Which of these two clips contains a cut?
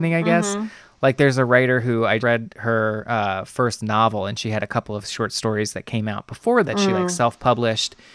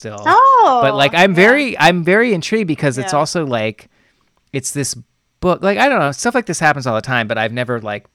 first; 2 cuts; at 2.2 s, 6.6 s

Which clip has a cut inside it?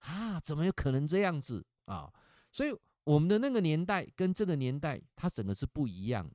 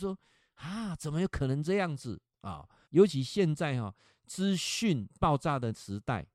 second; 1 cut; at 2.8 s

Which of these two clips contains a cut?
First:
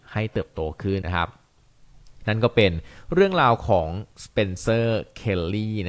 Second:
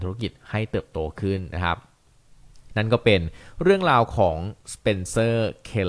first; 1 cut; at 1.0 s

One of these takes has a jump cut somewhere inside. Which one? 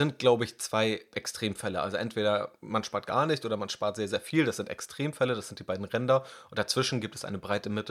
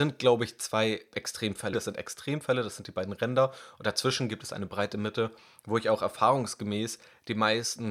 second; 1 cut; at 1.7 s

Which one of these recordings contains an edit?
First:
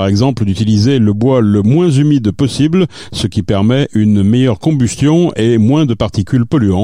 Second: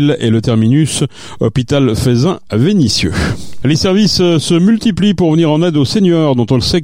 second; 1 cut; at 3.6 s

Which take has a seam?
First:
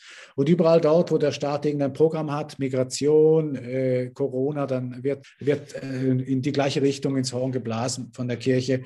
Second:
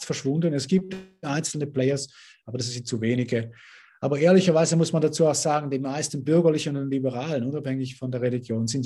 first; 1 cut; at 5.2 s

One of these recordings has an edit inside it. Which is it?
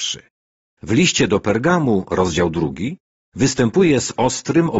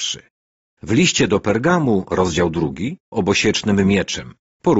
second; 1 cut; at 3.1 s

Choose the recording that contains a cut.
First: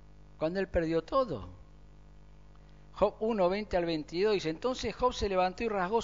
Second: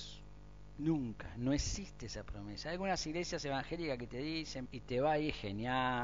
second; 1 cut; at 4.6 s

